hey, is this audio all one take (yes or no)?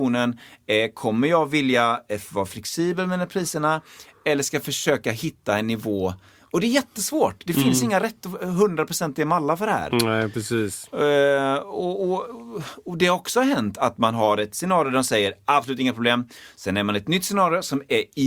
yes